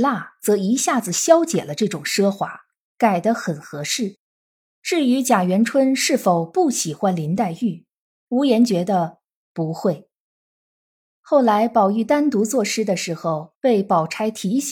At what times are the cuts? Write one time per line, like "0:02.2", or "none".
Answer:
0:04.6
0:11.1
0:13.5